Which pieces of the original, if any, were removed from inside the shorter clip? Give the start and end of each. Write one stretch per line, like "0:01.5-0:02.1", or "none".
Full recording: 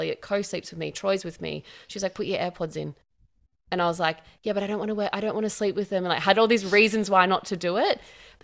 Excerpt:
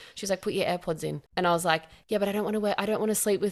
0:03.0-0:03.6